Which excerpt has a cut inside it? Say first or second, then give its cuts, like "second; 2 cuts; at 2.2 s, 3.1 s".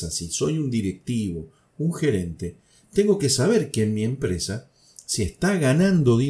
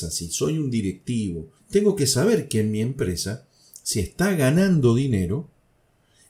second; 1 cut; at 1.6 s